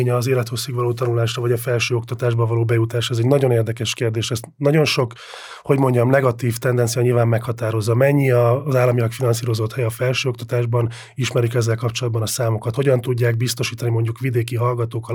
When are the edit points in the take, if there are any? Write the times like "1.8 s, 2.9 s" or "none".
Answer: none